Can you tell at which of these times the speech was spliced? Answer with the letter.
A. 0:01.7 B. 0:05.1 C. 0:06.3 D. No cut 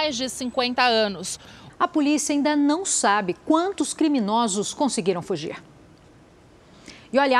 A